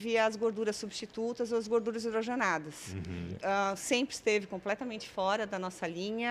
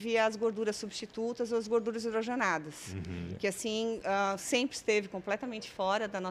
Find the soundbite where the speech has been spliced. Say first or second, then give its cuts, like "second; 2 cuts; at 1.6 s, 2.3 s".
first; 1 cut; at 3.4 s